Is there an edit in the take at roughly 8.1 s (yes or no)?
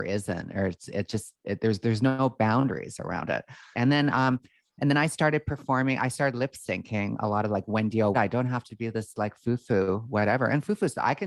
yes